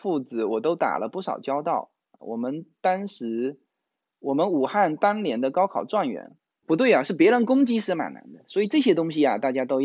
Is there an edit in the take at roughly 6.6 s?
yes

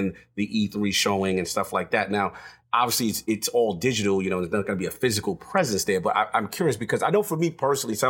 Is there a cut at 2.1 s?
no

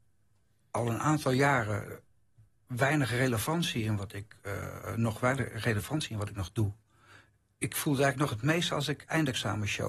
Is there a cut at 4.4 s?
no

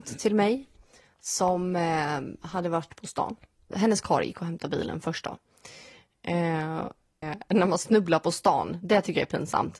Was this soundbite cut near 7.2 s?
yes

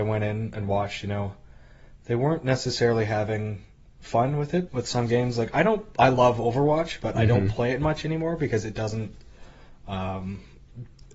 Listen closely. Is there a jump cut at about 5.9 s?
no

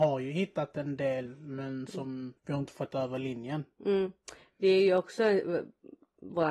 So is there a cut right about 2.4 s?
yes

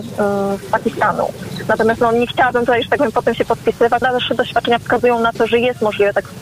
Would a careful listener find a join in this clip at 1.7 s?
no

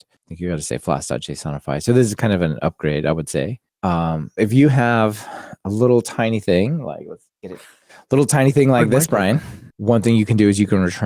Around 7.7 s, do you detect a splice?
no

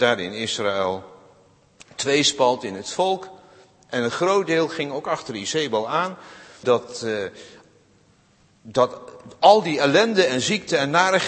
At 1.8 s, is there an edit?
no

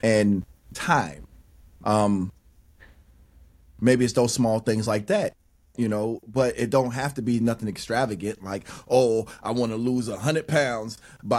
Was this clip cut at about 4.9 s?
no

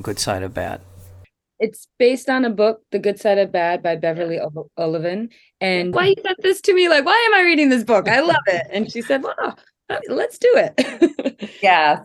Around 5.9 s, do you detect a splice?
yes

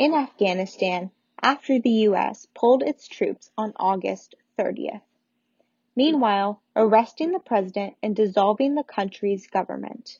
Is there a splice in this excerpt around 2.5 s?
no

